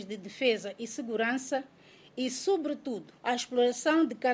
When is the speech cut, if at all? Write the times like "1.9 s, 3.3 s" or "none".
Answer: 3.2 s